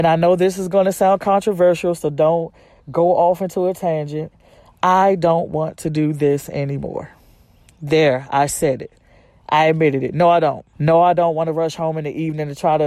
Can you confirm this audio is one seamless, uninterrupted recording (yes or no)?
no